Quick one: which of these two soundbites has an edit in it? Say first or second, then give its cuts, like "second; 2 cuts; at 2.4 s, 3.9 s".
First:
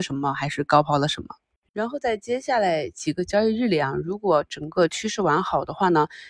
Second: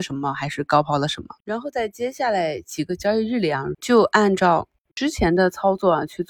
second; 2 cuts; at 1.4 s, 3.7 s